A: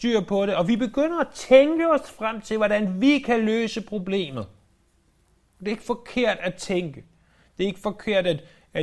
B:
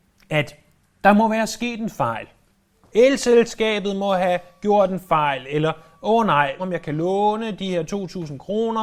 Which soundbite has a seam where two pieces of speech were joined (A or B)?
B